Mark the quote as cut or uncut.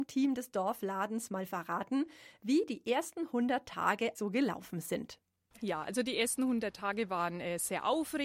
cut